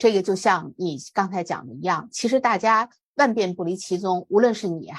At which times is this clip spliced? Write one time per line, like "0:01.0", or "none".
none